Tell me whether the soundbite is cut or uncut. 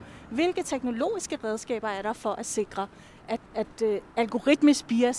cut